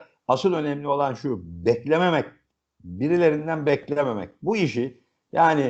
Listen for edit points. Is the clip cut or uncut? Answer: uncut